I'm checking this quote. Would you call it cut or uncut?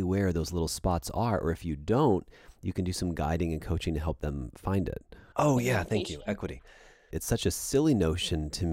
cut